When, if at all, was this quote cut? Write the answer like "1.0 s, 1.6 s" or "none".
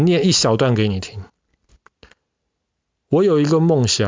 none